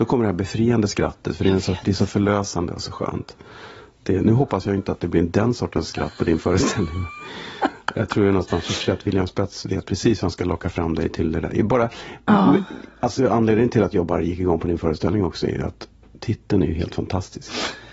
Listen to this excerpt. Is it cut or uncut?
uncut